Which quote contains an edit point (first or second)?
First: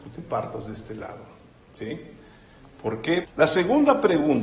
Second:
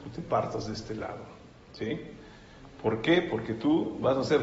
first